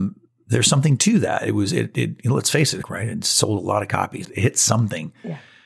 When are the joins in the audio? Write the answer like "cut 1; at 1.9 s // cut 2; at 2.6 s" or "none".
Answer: cut 1; at 2.8 s // cut 2; at 4.2 s